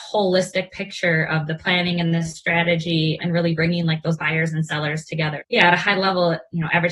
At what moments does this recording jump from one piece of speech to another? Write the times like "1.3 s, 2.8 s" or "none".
3.2 s, 5.4 s